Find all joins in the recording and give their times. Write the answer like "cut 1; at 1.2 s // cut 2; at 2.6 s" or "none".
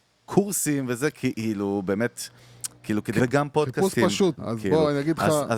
cut 1; at 3.2 s // cut 2; at 4.4 s